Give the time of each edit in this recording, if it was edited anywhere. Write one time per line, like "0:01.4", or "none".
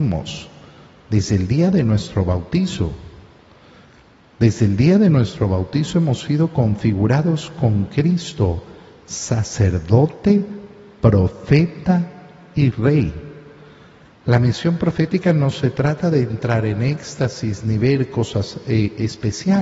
0:14.1

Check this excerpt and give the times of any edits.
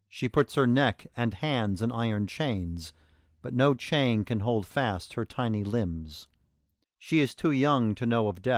0:06.8

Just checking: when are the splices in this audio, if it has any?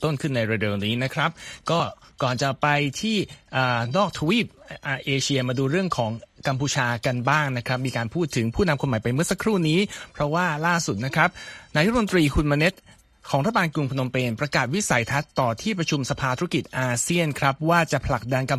none

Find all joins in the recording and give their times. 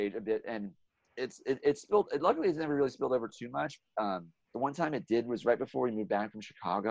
none

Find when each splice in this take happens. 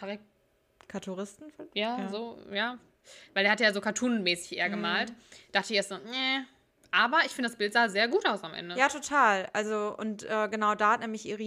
none

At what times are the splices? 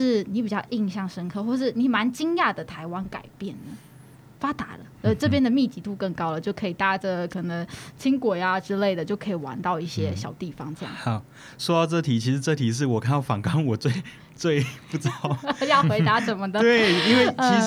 0:04.3

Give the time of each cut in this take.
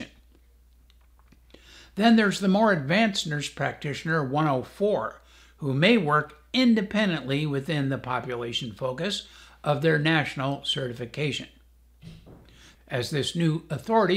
0:12.7

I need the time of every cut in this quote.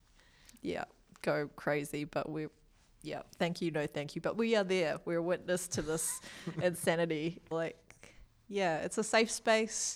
0:07.5

